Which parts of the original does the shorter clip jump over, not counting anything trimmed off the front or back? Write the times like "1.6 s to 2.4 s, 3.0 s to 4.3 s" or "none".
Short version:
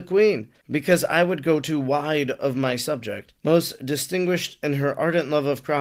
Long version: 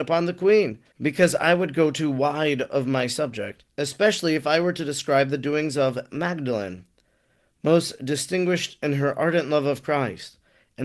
3.7 s to 7.6 s